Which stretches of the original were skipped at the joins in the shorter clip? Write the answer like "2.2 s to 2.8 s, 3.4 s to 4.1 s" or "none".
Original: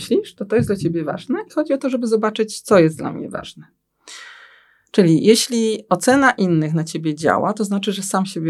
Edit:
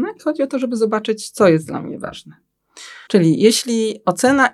4.4 s to 4.9 s